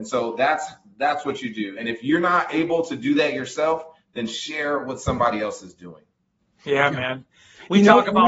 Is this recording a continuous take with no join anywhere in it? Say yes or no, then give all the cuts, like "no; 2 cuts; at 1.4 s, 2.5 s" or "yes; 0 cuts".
yes; 0 cuts